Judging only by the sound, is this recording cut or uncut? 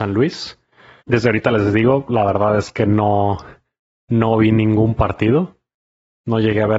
cut